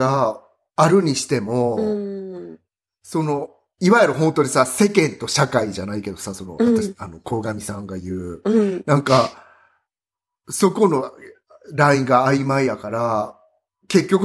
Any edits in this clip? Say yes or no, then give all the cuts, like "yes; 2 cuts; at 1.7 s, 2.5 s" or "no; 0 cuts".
no; 0 cuts